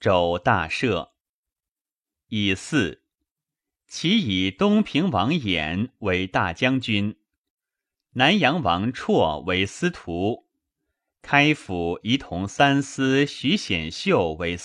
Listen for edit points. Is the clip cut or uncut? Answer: uncut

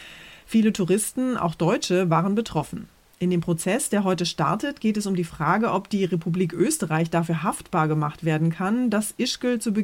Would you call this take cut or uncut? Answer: uncut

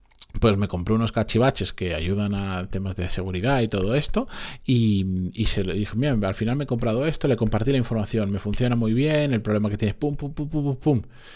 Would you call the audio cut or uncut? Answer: uncut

